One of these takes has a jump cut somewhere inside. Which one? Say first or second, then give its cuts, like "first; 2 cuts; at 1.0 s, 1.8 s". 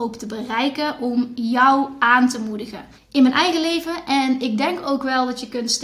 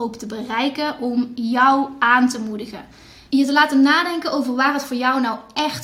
first; 1 cut; at 3.0 s